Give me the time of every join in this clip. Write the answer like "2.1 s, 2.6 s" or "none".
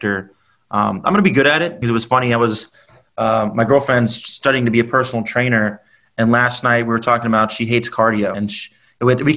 1.8 s, 8.3 s